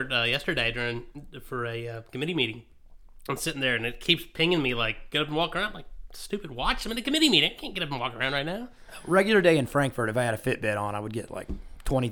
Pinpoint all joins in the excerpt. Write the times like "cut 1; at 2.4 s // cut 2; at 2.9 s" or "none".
none